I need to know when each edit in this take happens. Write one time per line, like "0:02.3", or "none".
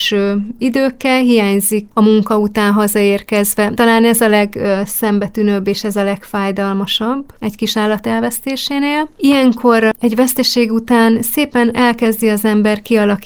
0:03.7
0:09.2